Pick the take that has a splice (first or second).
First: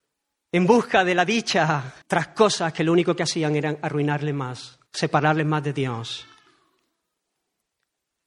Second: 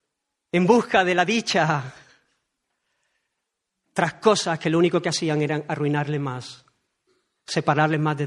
first